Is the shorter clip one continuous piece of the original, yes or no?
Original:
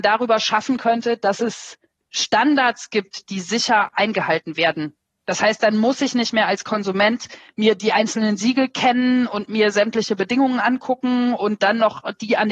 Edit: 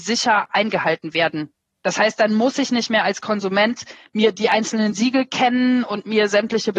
yes